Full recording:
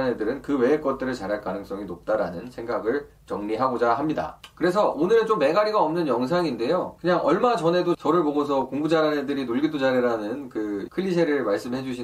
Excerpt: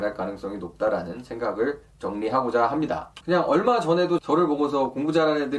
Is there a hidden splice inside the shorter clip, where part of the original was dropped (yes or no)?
yes